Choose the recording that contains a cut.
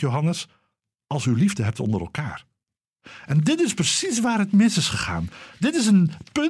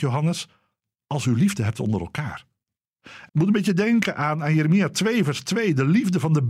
second; 1 cut; at 3.3 s

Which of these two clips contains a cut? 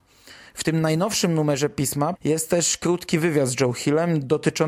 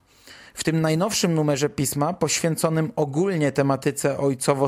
first; 1 cut; at 2.1 s

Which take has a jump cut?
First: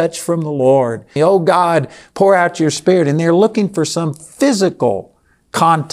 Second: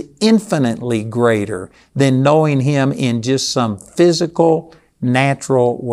first; 1 cut; at 1.2 s

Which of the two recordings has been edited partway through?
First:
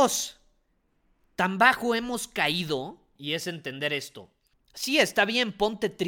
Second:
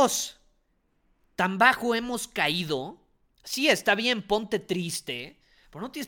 first; 2 cuts; at 3.2 s, 4.5 s

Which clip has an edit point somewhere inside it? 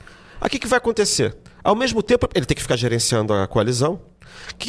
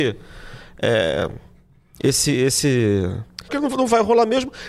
second; 1 cut; at 3.5 s

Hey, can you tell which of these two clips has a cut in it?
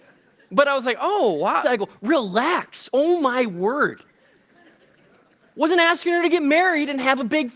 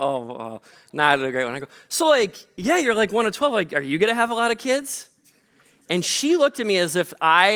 first; 1 cut; at 1.6 s

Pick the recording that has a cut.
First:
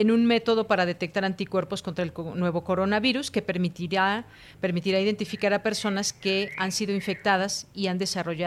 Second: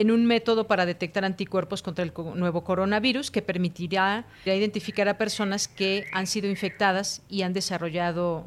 second; 1 cut; at 4.5 s

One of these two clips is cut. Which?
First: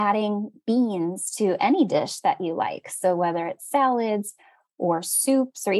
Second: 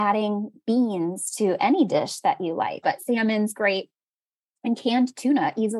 second; 1 cut; at 2.8 s

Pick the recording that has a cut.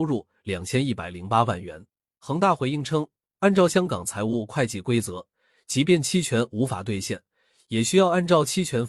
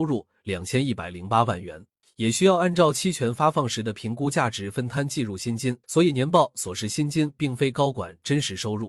second; 2 cuts; at 2.0 s, 5.8 s

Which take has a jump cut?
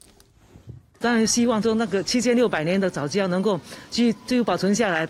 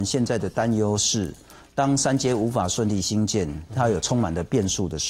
first; 1 cut; at 0.9 s

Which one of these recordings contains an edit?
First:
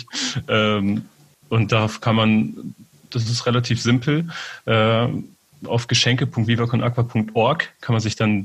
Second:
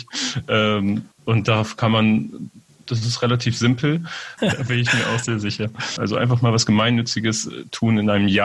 second; 3 cuts; at 1.1 s, 4.4 s, 6.0 s

